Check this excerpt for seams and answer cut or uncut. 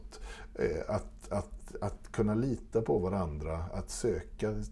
uncut